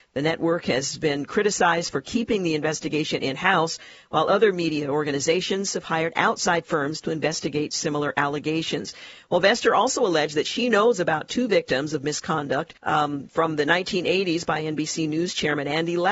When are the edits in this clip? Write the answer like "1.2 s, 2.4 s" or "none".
12.8 s